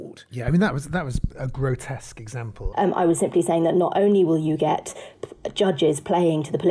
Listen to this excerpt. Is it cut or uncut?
cut